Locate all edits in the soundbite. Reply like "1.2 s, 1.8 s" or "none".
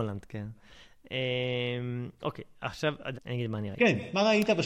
3.1 s